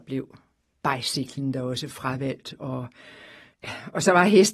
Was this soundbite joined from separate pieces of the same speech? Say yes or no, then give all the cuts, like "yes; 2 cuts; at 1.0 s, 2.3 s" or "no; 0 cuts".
no; 0 cuts